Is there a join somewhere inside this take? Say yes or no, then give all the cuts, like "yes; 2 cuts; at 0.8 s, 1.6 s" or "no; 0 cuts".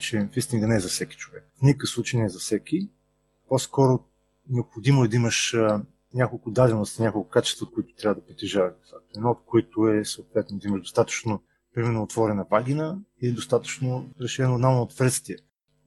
yes; 1 cut; at 1.5 s